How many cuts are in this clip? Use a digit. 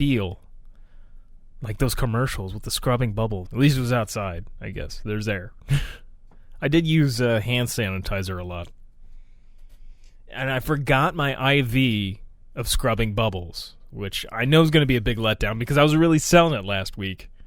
1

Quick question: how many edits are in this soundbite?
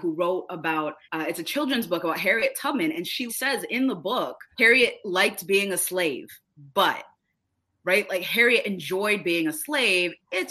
3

